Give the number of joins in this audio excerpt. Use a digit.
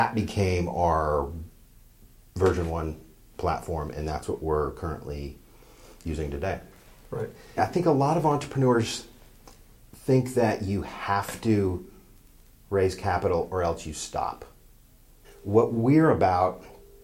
2